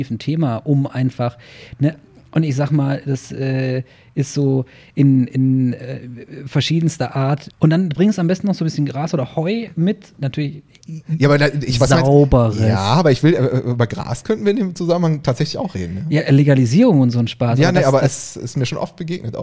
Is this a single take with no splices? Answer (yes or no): no